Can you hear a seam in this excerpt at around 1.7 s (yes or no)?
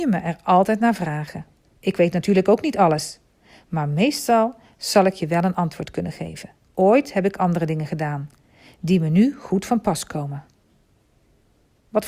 no